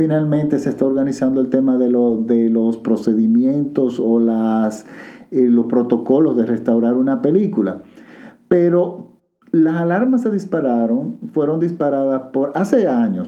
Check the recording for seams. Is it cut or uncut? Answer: uncut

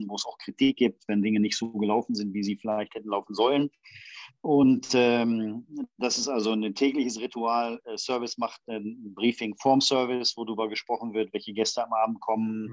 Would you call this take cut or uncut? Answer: uncut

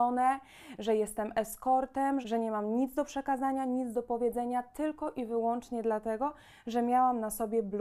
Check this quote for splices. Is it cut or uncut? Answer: cut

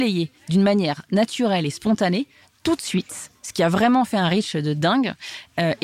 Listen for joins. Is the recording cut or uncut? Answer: uncut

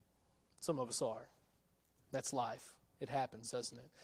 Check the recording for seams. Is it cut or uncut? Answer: uncut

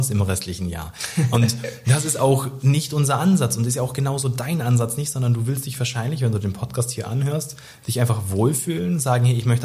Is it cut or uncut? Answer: uncut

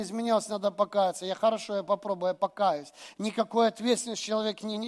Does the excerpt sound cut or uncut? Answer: uncut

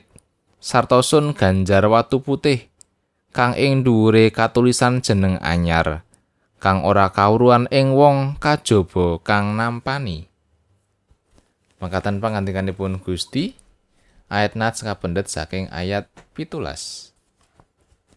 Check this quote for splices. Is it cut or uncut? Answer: uncut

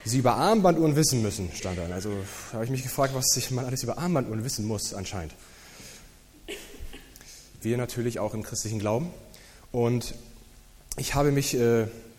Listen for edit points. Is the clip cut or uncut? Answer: cut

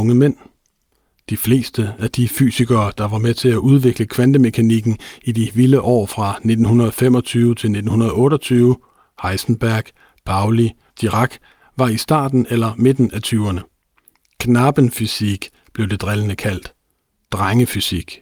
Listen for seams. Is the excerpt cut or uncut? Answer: cut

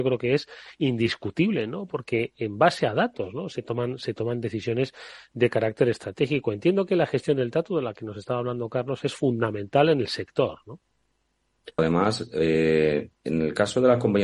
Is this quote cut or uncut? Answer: cut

